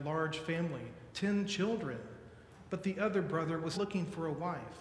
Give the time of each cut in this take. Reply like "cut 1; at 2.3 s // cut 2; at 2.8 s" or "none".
cut 1; at 3.7 s